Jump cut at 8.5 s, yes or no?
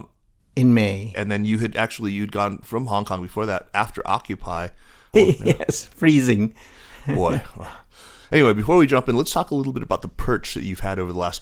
no